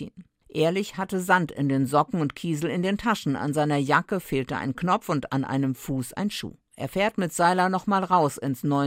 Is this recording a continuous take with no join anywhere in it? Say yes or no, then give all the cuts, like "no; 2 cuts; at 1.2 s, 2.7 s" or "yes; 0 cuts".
no; 1 cut; at 6.7 s